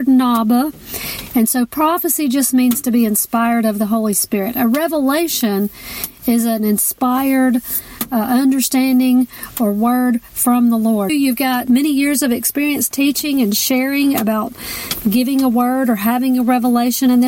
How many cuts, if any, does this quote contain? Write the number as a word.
one